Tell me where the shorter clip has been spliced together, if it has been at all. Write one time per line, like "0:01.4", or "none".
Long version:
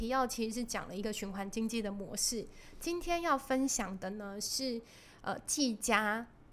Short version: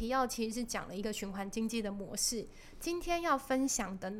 none